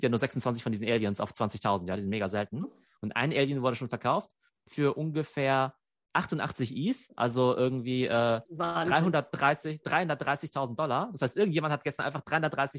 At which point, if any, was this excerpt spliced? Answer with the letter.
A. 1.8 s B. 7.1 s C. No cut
C